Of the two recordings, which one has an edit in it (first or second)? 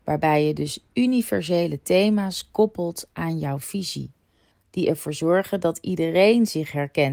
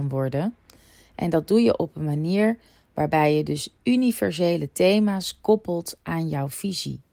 first